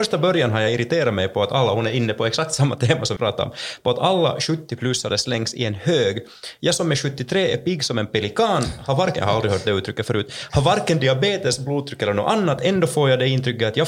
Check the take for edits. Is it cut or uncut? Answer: cut